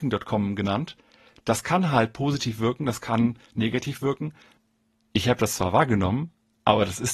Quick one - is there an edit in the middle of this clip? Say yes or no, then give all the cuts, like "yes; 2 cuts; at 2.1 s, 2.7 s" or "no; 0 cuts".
no; 0 cuts